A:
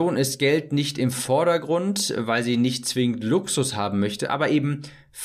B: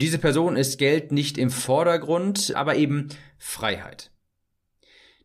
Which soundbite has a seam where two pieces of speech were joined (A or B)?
B